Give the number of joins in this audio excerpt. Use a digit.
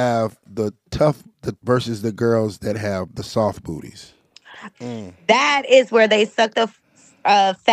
2